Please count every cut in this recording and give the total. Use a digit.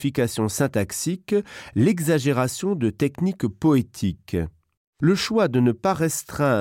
1